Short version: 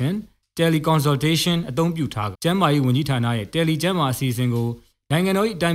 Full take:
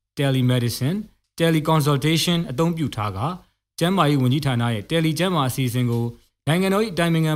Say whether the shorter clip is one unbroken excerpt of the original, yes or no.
no